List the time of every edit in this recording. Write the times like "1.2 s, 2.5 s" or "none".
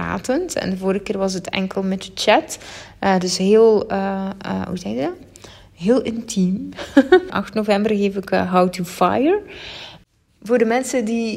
7.3 s